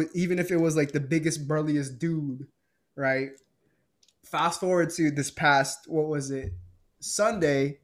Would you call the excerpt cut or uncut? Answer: uncut